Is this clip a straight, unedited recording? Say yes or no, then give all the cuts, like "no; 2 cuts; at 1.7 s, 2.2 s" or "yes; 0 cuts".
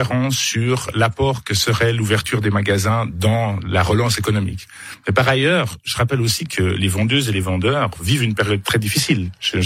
yes; 0 cuts